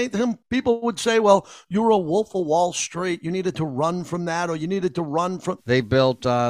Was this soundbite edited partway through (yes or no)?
yes